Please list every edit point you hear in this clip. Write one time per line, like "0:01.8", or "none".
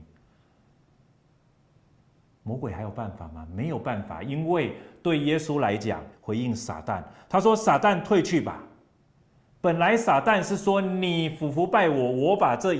0:06.1